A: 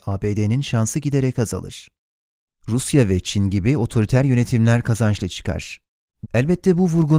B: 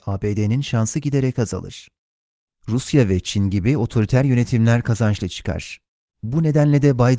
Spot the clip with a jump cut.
A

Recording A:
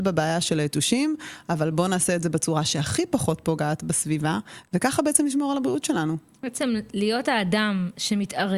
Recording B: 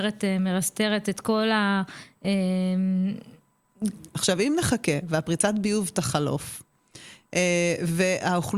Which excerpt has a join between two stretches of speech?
B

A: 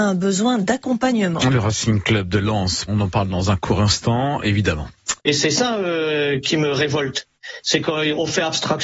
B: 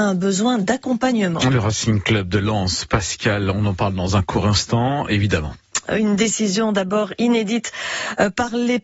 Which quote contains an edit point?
A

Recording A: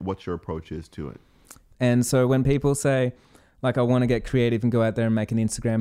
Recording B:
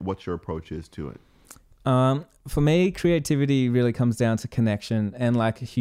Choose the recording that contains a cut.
A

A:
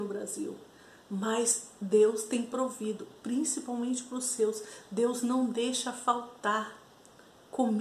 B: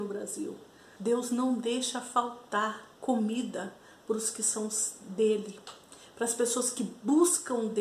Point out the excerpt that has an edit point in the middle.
B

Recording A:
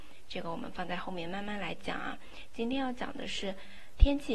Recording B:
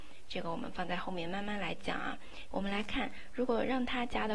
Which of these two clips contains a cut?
B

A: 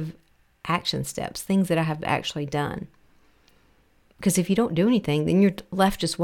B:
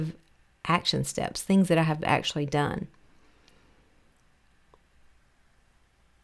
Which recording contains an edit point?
A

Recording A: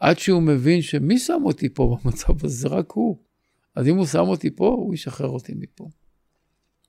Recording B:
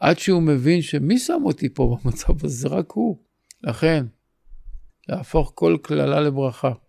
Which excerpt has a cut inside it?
B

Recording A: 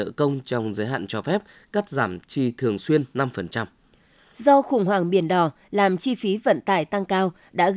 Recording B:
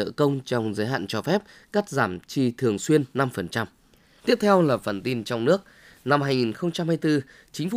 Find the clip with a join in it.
B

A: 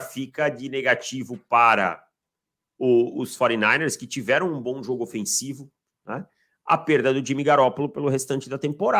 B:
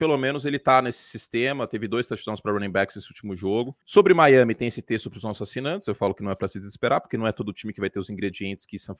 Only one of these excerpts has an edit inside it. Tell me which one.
B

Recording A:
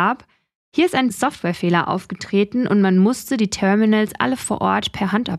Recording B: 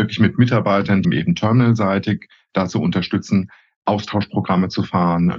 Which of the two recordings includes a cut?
B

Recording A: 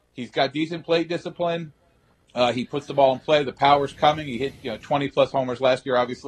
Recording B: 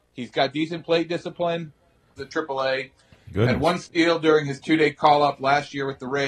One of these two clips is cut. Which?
B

